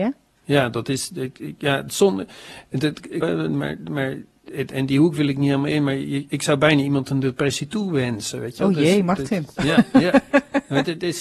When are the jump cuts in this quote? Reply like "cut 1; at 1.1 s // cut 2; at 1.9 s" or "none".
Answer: cut 1; at 3.2 s

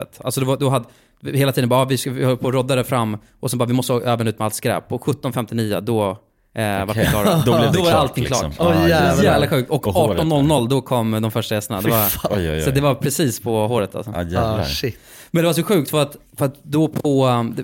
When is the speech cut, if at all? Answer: none

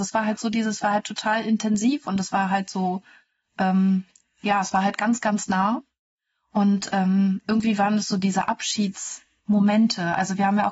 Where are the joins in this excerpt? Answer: none

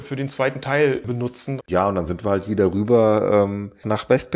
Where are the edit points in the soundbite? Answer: cut 1; at 1.6 s

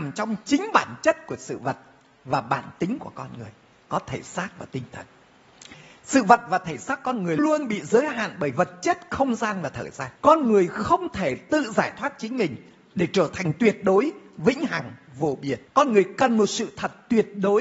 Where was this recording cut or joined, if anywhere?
cut 1; at 7.4 s // cut 2; at 10.2 s // cut 3; at 15.7 s

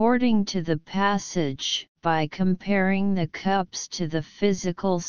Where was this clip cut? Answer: cut 1; at 1.9 s

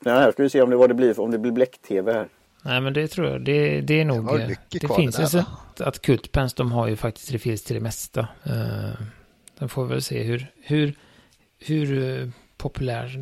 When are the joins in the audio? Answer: cut 1; at 5.7 s

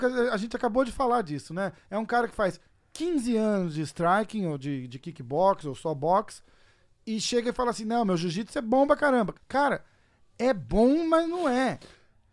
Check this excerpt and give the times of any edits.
cut 1; at 9.4 s

